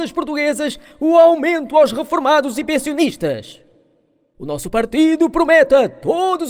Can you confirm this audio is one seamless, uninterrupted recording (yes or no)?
yes